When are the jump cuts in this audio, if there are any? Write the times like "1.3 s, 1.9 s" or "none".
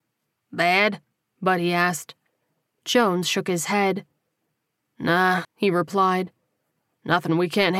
5.4 s